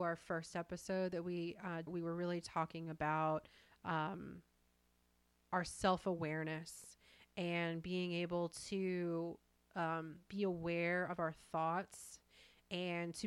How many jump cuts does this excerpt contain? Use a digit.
1